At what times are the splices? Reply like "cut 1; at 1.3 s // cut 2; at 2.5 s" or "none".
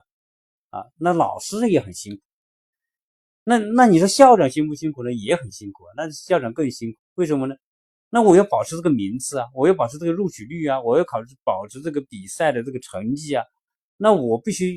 cut 1; at 7.0 s